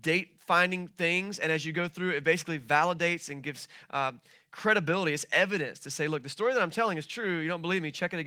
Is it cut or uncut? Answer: uncut